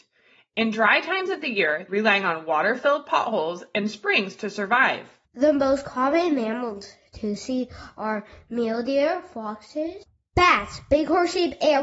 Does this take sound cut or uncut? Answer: cut